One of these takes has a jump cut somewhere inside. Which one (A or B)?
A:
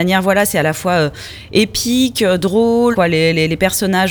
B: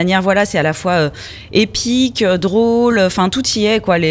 A